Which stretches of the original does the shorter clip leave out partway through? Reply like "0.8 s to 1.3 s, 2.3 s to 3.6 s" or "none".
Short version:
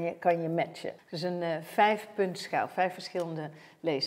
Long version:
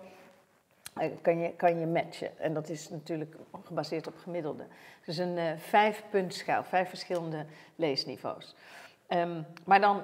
2.4 s to 4.9 s

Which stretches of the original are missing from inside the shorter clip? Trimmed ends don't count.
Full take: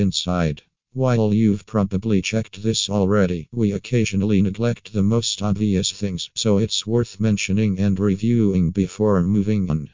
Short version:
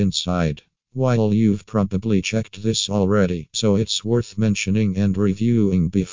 3.5 s to 6.3 s

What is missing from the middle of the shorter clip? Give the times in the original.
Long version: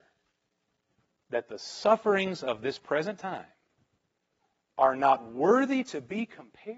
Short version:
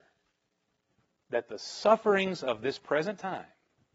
none

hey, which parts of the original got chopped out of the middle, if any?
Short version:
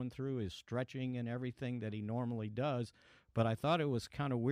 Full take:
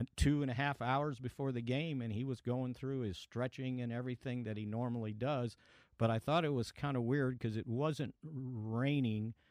none

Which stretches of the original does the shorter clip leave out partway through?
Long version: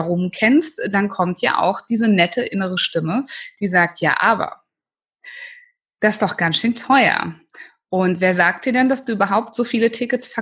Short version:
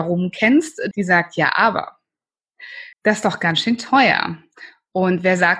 0.9 s to 3.6 s, 5.6 s to 5.9 s

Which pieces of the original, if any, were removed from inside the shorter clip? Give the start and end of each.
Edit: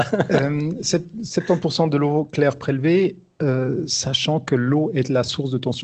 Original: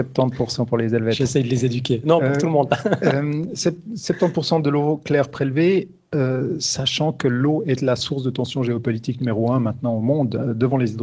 none

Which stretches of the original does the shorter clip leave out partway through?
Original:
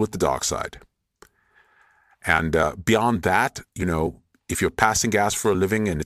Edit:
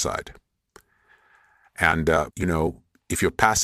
2.8 s to 3.7 s

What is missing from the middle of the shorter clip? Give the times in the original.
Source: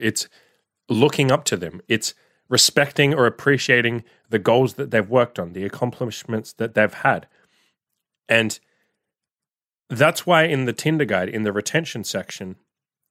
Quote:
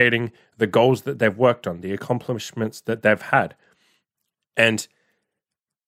none

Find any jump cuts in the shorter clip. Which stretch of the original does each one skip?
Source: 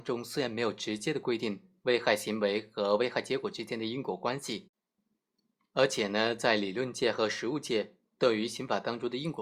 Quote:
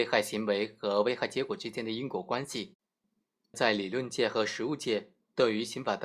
5.5 s to 6.4 s

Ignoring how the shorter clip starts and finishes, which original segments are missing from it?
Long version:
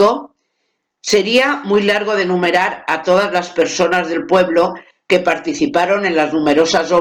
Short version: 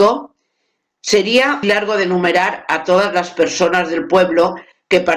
1.6 s to 1.8 s

